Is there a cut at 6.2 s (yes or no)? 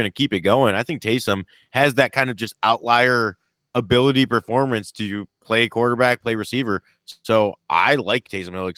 yes